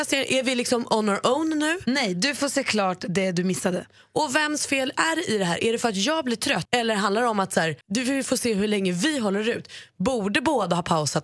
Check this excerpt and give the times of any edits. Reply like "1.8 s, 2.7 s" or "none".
6.7 s, 7.8 s